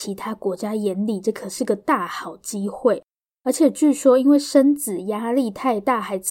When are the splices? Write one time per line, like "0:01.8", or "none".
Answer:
0:03.4